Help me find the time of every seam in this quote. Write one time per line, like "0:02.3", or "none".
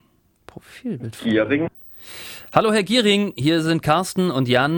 none